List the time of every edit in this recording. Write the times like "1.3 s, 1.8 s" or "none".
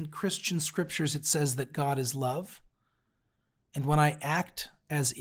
none